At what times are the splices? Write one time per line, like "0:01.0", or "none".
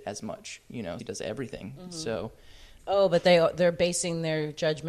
0:01.0
0:02.8